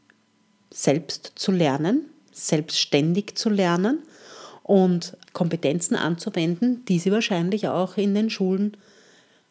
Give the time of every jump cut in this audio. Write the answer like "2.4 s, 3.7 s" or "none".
5.3 s